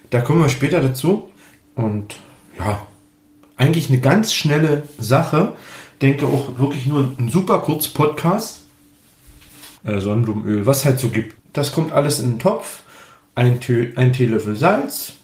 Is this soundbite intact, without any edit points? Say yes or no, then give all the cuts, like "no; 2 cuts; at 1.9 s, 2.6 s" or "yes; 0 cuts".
no; 3 cuts; at 1.6 s, 9.7 s, 11.4 s